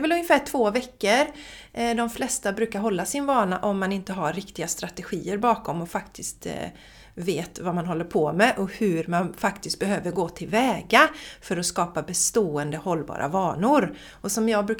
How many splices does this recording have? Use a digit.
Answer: 0